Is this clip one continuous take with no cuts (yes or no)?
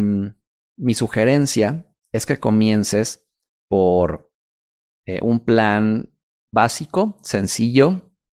yes